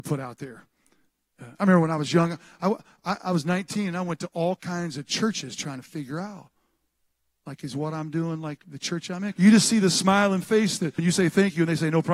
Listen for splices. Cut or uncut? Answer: cut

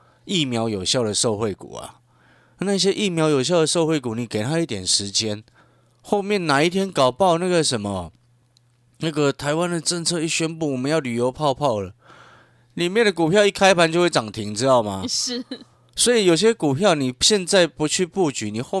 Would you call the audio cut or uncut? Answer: uncut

